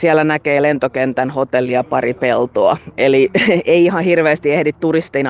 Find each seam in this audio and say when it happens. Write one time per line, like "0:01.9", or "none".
none